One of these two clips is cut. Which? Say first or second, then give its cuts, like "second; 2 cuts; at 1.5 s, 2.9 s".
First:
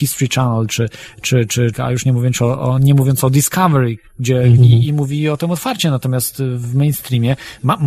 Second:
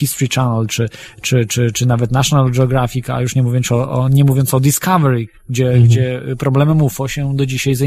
first; 2 cuts; at 1.7 s, 4.6 s